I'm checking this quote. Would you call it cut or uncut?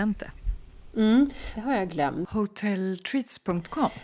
cut